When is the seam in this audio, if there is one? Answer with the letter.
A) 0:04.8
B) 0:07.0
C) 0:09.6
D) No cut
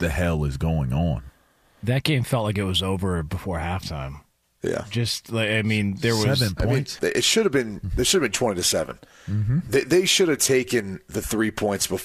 B